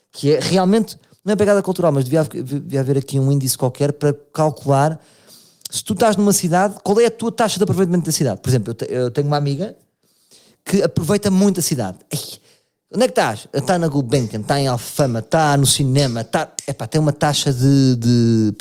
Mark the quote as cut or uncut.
uncut